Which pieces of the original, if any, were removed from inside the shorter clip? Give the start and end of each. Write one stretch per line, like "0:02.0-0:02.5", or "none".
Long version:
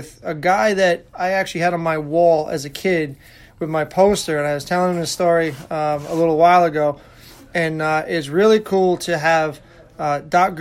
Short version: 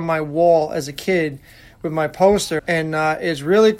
0:04.4-0:07.5